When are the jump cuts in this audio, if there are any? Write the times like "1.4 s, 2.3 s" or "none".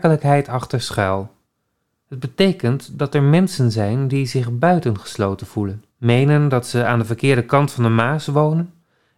2.0 s, 5.9 s